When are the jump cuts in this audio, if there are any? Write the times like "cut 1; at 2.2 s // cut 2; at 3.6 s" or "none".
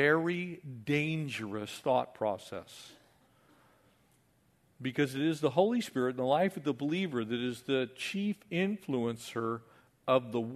none